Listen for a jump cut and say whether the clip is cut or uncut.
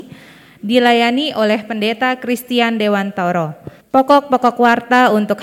cut